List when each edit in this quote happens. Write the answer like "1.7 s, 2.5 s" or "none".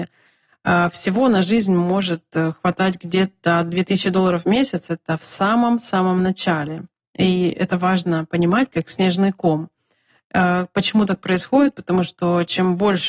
8.7 s